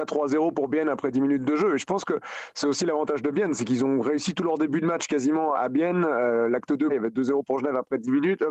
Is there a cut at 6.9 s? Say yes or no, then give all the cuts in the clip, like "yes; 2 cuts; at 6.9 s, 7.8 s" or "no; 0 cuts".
yes; 2 cuts; at 5.5 s, 6.9 s